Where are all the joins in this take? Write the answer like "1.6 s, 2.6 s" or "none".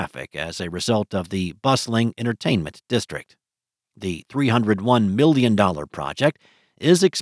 3.8 s